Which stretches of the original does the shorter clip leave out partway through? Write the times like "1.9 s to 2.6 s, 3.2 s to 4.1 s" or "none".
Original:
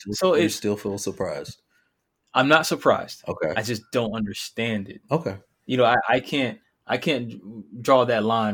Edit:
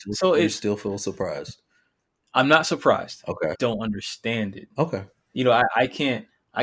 3.5 s to 3.9 s